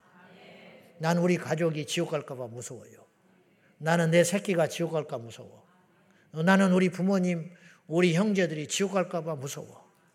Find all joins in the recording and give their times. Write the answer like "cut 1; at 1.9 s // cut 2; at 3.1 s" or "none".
none